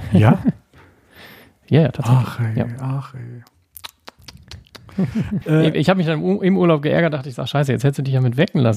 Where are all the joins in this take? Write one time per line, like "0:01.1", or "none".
0:05.4